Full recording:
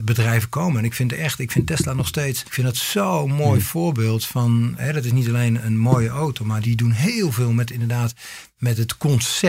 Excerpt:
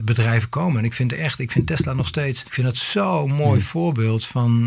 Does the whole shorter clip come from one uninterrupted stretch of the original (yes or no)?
yes